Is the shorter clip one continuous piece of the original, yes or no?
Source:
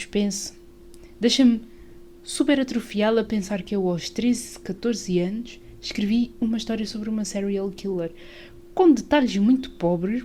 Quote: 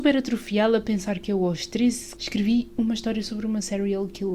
no